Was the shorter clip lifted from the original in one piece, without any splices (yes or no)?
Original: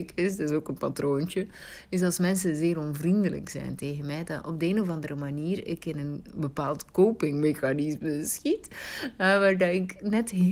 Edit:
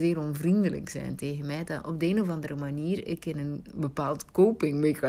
yes